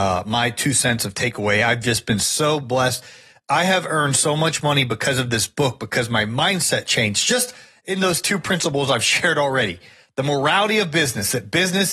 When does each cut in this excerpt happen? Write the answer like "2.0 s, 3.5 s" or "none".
none